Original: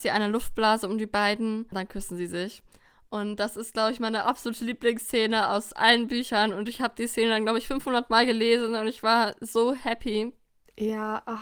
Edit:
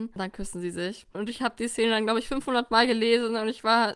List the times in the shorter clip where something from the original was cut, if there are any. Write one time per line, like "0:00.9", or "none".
0:01.1